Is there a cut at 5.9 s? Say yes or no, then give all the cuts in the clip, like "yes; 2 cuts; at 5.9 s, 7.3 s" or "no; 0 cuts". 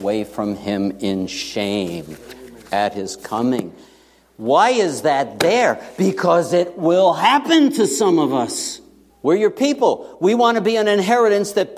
no; 1 cut; at 9.1 s